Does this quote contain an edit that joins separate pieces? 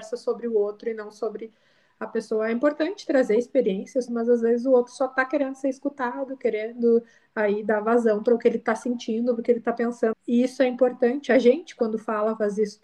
yes; 2 cuts; at 4.1 s, 10.1 s

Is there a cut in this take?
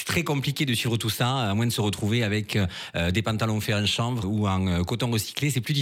yes; 1 cut; at 4.2 s

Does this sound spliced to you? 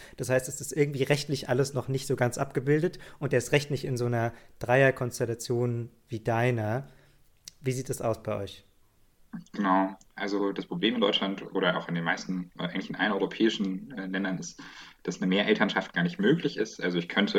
no; 0 cuts

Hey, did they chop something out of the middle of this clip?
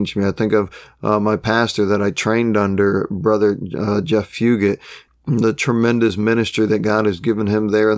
yes; 1 cut; at 5.1 s

